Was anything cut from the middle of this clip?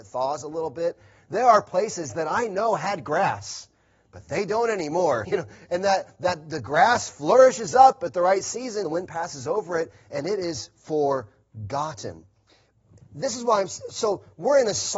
yes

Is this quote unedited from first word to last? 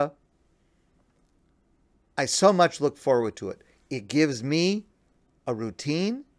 yes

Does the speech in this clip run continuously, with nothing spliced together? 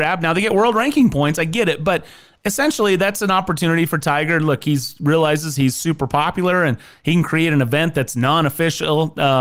yes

